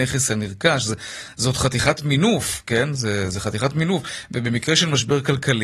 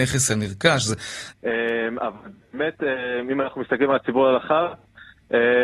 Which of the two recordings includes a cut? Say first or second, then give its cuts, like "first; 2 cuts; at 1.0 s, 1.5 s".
second; 1 cut; at 1.3 s